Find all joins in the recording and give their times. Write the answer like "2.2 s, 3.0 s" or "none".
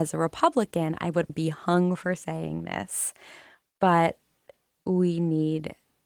1.3 s